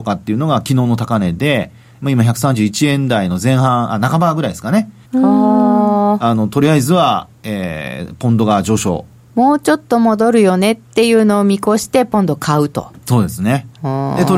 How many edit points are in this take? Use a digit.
1